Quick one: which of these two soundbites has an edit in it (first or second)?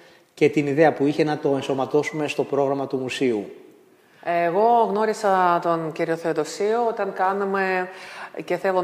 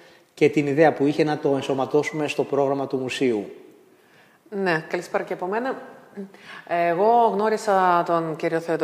first